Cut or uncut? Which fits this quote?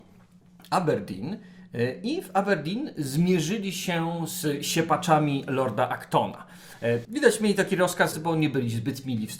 cut